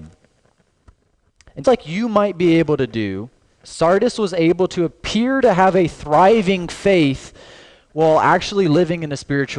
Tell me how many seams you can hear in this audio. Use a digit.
1